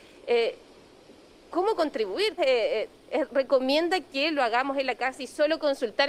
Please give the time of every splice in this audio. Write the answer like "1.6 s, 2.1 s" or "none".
2.4 s